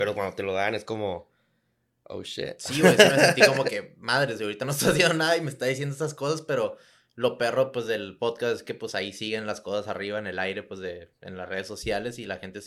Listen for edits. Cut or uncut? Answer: uncut